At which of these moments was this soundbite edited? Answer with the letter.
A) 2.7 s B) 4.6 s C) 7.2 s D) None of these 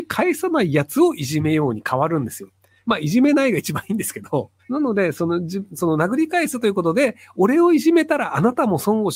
B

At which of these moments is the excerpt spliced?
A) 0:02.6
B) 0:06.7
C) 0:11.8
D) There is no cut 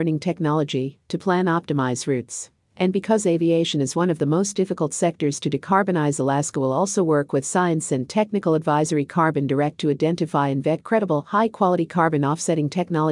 A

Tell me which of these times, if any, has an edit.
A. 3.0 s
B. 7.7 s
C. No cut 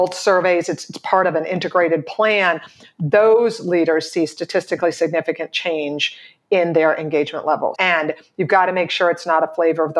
B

